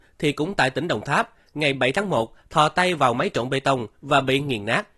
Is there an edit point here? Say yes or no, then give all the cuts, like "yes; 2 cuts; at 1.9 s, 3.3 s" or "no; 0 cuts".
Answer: yes; 1 cut; at 2.4 s